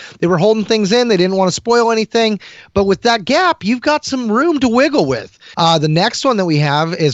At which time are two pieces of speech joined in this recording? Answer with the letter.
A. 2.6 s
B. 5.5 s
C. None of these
B